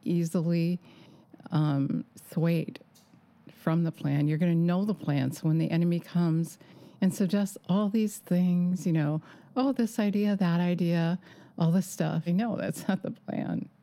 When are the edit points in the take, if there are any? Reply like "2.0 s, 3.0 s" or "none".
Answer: 12.3 s